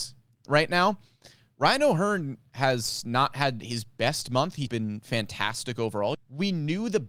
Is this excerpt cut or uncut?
cut